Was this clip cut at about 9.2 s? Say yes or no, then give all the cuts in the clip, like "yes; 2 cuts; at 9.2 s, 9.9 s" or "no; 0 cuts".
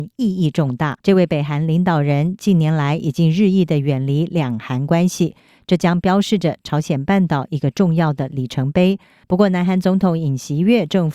yes; 2 cuts; at 1.0 s, 9.2 s